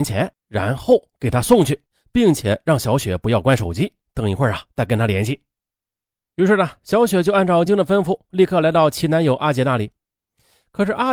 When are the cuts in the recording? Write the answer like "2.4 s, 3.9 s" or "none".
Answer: 7.7 s